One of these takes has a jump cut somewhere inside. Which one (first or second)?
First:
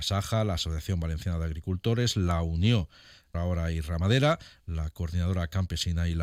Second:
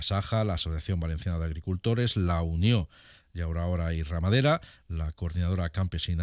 first